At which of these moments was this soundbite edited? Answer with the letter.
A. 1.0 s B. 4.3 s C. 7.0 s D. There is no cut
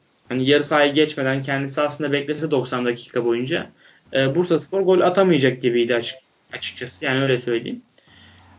D